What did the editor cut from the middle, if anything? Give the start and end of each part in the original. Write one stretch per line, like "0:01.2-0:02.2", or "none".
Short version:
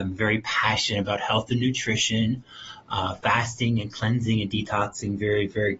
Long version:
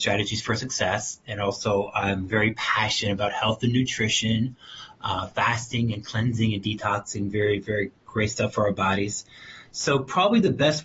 none